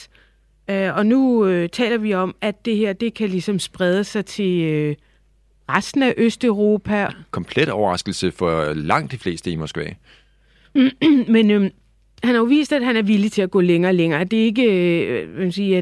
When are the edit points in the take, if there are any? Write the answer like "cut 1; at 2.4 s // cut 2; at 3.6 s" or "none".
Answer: cut 1; at 7.1 s // cut 2; at 12.2 s